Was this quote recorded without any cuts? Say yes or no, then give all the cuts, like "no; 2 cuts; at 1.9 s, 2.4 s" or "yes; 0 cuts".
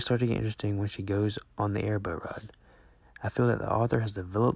no; 1 cut; at 3.0 s